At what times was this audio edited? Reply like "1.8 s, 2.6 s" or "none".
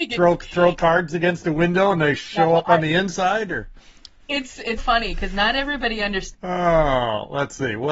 4.8 s, 6.3 s

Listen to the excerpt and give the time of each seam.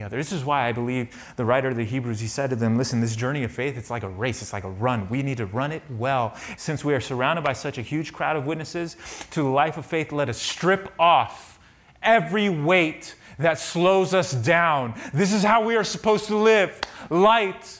6.6 s

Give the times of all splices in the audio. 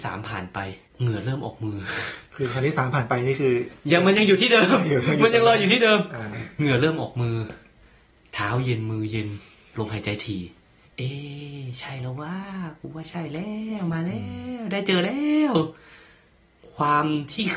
none

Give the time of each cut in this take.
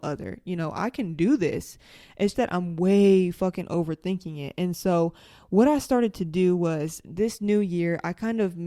2.3 s

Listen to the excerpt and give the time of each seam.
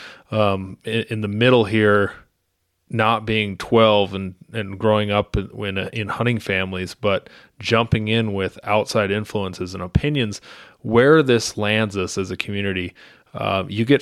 none

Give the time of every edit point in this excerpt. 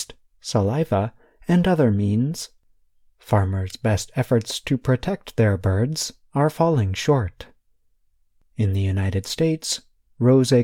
none

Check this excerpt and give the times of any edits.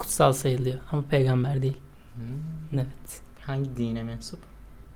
none

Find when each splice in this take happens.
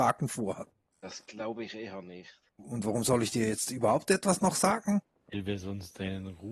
0.9 s

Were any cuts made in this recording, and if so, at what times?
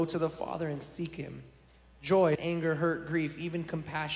2.4 s

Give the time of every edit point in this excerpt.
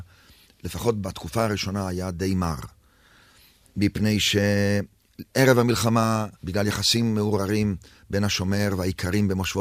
6.3 s

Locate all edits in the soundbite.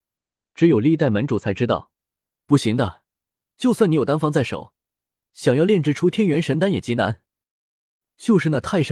2.3 s

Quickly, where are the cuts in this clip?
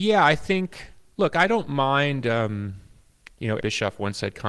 3.6 s

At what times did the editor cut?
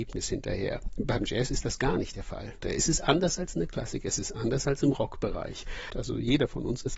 2.6 s, 5.9 s

